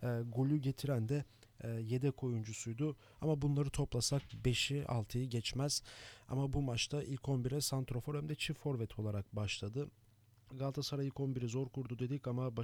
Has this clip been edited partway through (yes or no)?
yes